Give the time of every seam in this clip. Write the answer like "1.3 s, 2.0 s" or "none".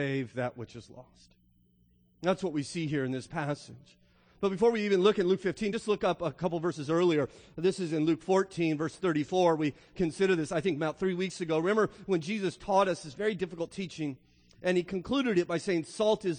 none